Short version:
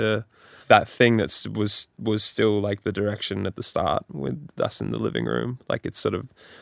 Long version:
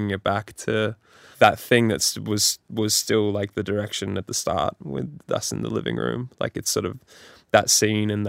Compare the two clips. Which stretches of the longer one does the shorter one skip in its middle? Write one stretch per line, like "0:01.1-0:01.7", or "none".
none